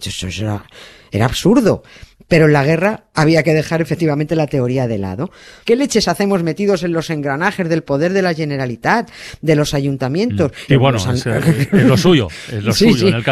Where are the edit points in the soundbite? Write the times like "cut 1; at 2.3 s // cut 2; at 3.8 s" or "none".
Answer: cut 1; at 5.6 s // cut 2; at 10.7 s